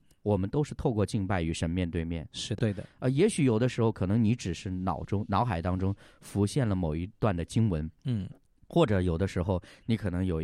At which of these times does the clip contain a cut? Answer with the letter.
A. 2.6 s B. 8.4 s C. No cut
A